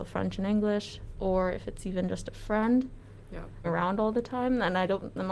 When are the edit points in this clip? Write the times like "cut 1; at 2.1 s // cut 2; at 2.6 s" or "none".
cut 1; at 3.6 s